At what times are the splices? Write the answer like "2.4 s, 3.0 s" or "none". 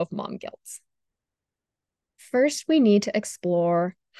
2.2 s